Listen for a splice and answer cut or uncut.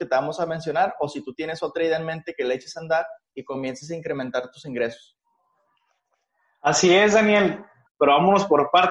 cut